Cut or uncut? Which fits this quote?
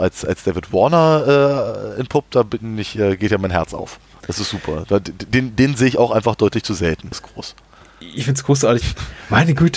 cut